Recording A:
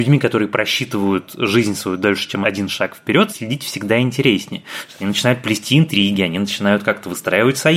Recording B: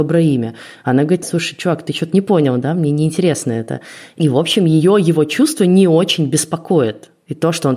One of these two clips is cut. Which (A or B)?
B